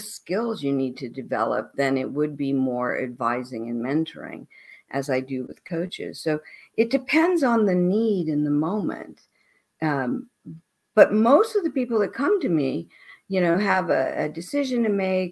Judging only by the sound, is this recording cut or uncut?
uncut